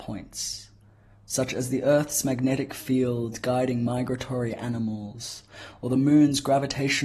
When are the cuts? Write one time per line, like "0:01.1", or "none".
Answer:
none